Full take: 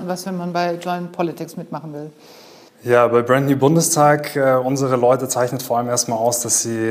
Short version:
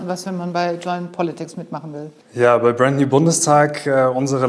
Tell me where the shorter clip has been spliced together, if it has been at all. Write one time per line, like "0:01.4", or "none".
0:02.2